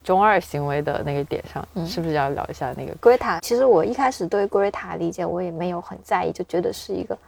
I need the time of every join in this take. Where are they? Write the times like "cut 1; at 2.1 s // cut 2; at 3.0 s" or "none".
cut 1; at 3.4 s